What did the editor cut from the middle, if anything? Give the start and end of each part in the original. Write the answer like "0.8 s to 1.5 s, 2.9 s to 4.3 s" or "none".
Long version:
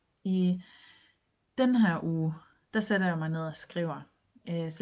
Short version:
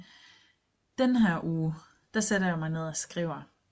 none

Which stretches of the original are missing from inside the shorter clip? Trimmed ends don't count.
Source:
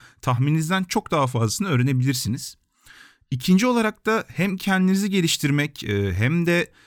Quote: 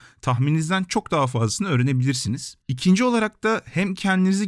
2.6 s to 3.2 s

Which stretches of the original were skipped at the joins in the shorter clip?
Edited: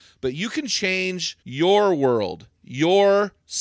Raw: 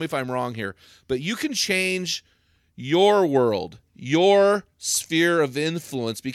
2.3 s to 2.7 s

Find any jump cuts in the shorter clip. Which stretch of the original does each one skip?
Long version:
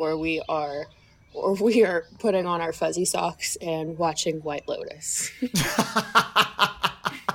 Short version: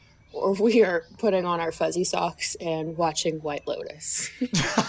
none

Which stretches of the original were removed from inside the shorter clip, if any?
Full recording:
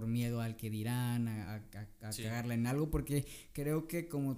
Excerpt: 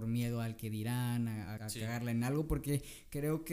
1.6 s to 2.0 s

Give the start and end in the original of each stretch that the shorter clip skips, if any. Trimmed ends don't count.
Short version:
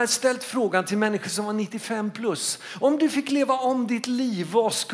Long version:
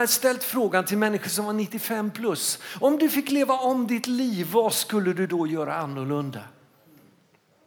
none

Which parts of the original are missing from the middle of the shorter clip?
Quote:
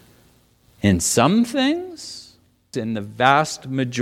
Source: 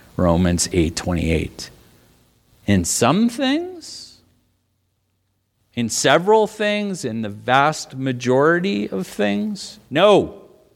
4.6 s to 7.0 s

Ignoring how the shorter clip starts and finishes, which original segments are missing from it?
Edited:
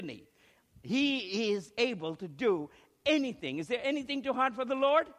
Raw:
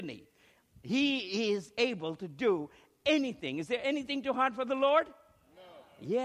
none

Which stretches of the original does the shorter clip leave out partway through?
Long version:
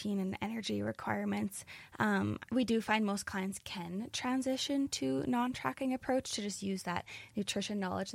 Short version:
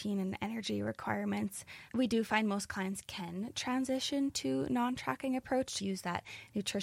1.9 s to 2.5 s, 6.4 s to 6.6 s

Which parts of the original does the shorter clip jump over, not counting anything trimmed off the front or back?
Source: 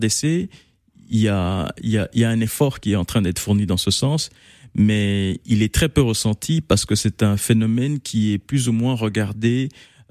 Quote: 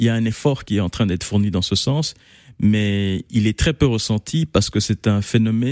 none

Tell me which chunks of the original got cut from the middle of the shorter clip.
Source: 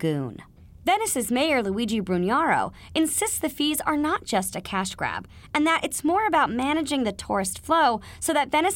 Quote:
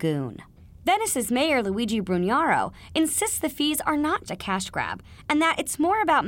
4.3 s to 4.5 s

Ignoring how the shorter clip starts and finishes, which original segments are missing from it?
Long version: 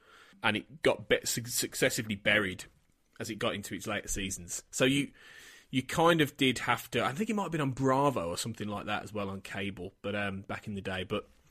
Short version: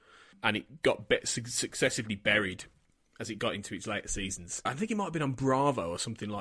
4.7 s to 7.0 s

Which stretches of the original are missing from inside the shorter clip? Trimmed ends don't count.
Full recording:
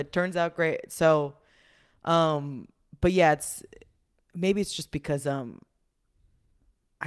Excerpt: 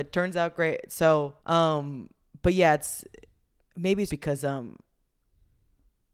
1.4 s to 2.0 s, 4.7 s to 4.9 s

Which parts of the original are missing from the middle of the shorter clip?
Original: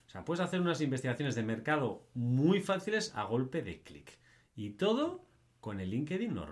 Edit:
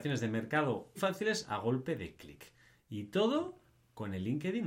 2.1 s to 2.6 s

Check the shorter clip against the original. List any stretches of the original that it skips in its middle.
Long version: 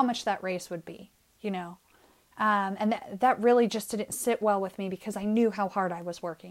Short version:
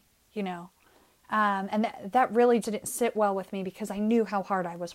3.7 s to 3.9 s

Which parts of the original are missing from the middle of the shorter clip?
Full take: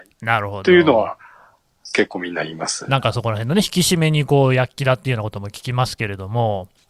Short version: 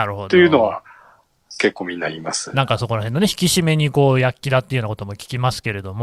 none

